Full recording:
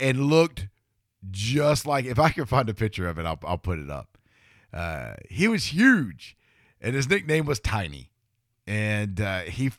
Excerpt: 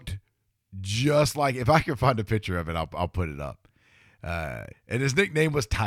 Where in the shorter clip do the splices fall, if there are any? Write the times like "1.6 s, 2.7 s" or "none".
4.7 s